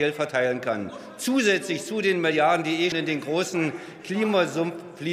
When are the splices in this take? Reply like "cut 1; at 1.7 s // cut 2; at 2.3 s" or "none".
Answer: cut 1; at 2.9 s